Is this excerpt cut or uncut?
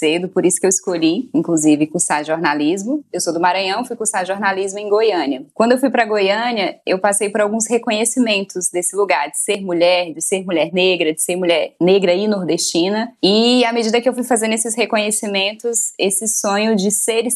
uncut